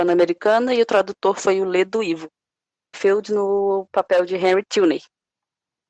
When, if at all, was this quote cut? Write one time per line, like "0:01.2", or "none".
0:02.9